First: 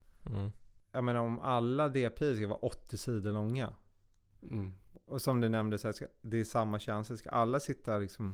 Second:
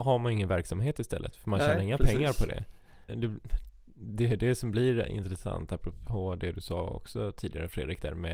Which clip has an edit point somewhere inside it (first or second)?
second